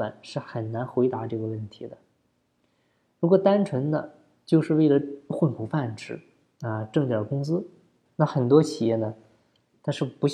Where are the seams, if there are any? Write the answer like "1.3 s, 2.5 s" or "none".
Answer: 8.1 s